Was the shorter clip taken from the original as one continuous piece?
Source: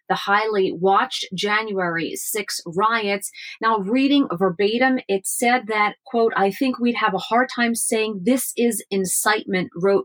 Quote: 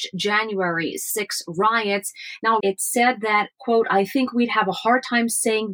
no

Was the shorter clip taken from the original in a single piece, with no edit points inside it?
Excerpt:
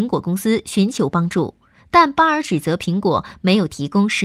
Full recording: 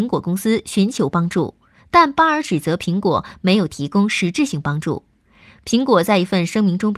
yes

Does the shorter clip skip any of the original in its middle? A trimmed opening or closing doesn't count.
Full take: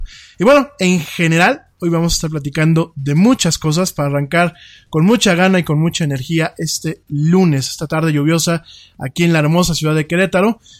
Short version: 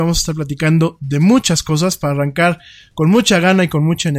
no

